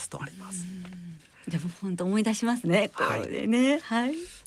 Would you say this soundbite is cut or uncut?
uncut